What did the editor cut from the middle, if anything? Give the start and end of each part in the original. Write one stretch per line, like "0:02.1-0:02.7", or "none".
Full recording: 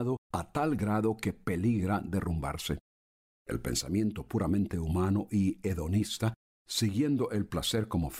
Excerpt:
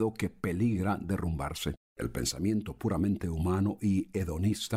0:02.9-0:03.3